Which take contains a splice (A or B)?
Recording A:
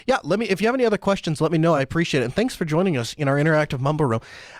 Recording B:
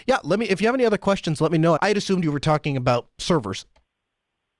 B